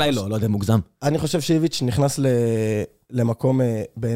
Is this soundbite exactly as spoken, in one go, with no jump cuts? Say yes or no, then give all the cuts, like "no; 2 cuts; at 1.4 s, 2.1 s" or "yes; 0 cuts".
yes; 0 cuts